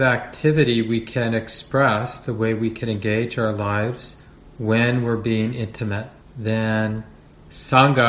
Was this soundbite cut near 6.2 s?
yes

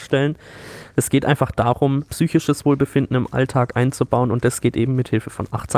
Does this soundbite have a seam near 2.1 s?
yes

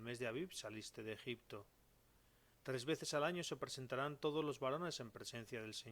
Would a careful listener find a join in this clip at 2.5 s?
yes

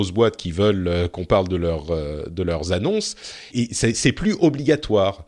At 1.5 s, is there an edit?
no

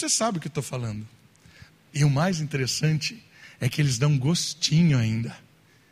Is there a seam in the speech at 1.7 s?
yes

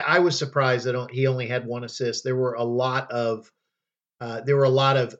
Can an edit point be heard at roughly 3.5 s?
no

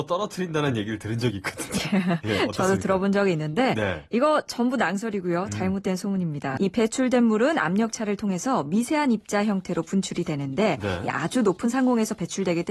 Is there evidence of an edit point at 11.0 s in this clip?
no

